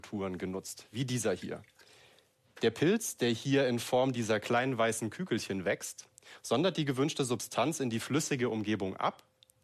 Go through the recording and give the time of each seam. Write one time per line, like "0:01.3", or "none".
none